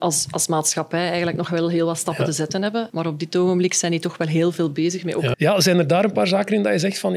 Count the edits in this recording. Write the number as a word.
two